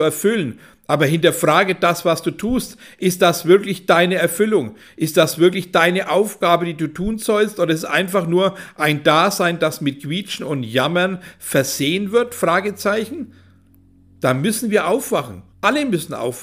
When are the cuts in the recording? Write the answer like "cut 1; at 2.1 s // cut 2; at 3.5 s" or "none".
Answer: cut 1; at 15.5 s